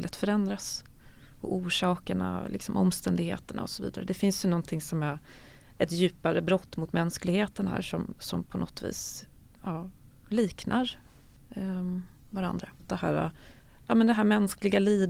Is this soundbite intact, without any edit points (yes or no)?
no